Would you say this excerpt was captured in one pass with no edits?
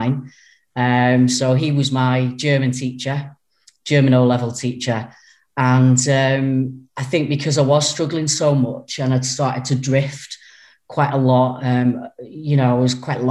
yes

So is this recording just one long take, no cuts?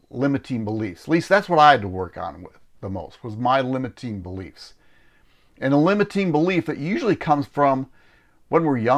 yes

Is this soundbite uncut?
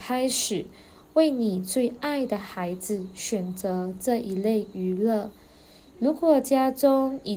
yes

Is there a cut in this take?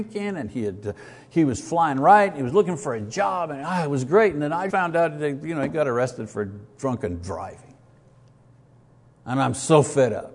yes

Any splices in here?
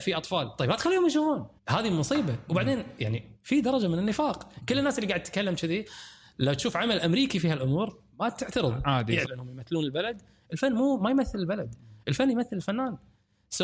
yes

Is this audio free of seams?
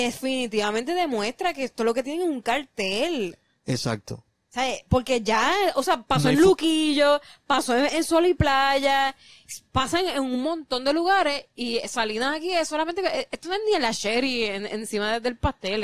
yes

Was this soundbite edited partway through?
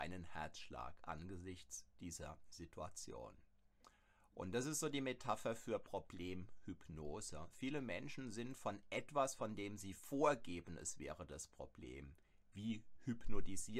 no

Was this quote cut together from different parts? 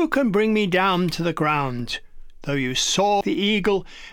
yes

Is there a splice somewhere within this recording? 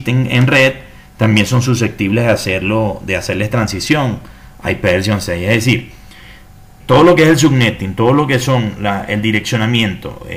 yes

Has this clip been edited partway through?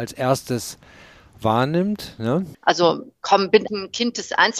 yes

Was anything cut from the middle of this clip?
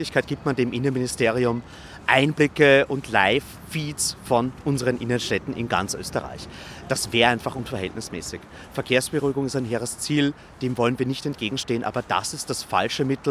no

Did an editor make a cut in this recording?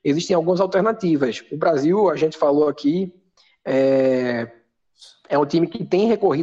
no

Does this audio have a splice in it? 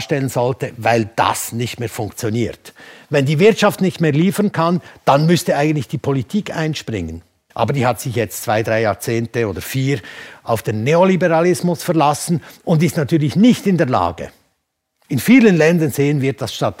yes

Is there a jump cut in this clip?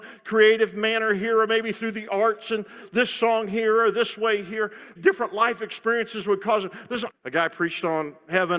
yes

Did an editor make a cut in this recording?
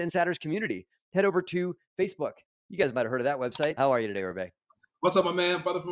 yes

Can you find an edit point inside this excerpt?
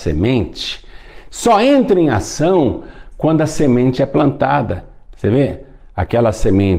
no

